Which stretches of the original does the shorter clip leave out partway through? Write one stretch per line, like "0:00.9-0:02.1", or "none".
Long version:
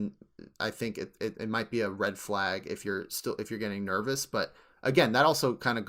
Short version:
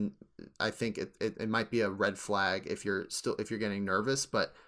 none